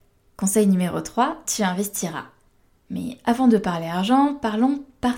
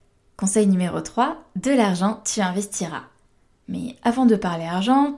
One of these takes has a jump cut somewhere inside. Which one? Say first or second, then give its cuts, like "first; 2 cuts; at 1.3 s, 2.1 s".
first; 1 cut; at 1.4 s